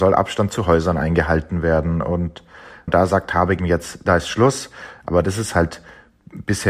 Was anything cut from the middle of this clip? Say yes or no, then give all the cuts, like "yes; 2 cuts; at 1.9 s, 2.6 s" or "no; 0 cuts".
yes; 2 cuts; at 3.6 s, 5.0 s